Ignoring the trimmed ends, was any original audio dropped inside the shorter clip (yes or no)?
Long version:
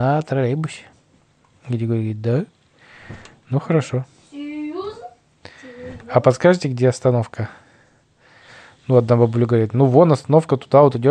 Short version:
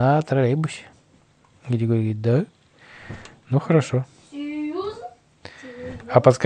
no